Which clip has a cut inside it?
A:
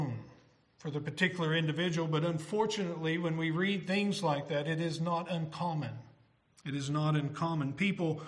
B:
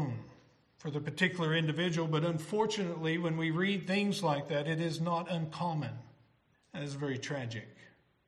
B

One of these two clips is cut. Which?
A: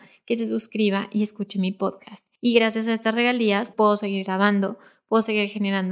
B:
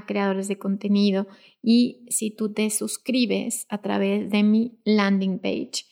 A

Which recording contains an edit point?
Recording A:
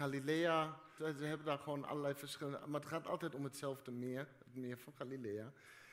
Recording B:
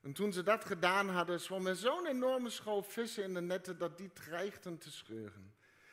A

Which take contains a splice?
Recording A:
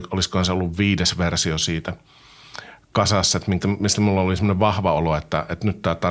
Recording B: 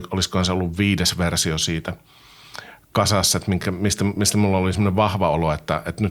A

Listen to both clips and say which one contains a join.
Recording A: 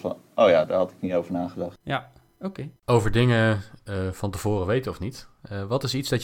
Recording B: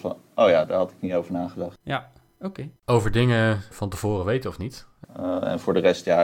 B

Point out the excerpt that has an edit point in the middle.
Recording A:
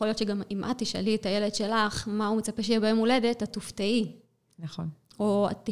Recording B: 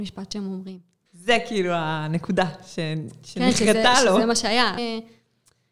B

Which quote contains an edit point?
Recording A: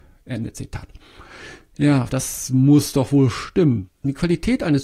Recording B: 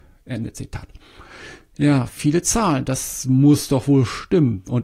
A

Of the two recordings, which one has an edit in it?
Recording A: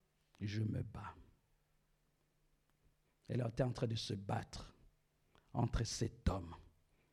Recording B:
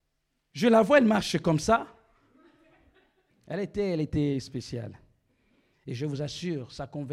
B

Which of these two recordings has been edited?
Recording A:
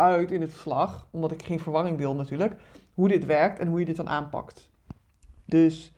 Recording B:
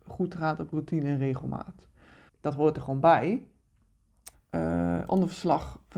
B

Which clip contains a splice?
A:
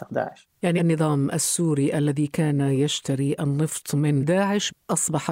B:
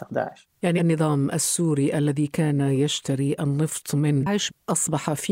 B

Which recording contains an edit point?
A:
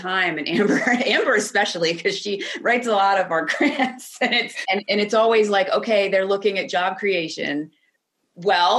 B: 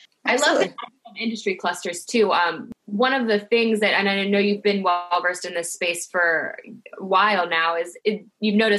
A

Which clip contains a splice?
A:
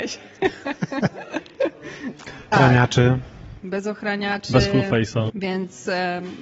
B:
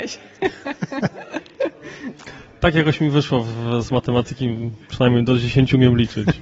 A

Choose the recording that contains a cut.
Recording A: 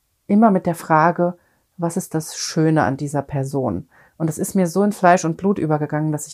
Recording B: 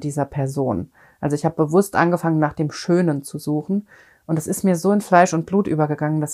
A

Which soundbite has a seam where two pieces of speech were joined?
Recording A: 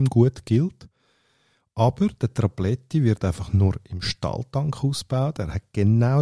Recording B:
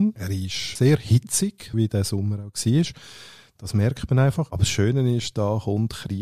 B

